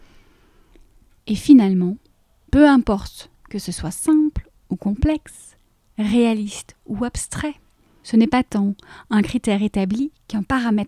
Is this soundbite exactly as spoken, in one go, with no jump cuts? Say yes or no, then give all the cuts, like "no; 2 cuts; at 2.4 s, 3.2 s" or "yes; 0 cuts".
yes; 0 cuts